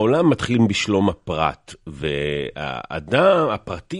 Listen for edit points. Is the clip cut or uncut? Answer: uncut